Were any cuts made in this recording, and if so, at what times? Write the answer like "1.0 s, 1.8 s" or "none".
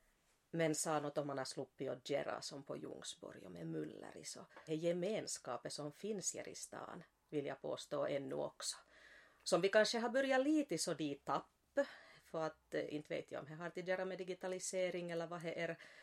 4.7 s